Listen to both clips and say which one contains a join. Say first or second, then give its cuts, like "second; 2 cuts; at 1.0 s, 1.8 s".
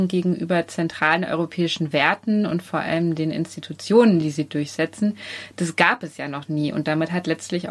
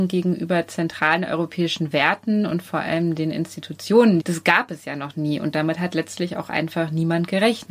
second; 1 cut; at 4.2 s